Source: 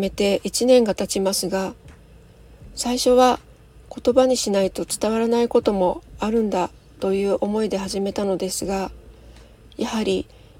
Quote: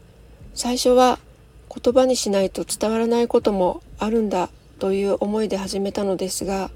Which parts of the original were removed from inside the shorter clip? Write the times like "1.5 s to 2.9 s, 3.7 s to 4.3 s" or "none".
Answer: none